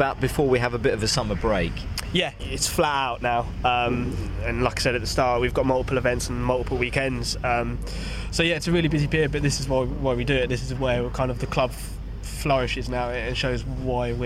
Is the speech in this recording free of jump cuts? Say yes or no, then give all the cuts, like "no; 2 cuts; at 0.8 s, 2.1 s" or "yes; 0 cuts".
yes; 0 cuts